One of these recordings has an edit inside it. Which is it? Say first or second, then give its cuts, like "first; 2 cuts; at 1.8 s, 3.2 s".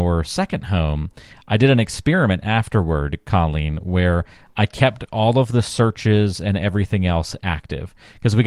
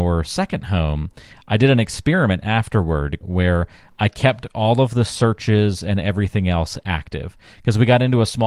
second; 1 cut; at 3.2 s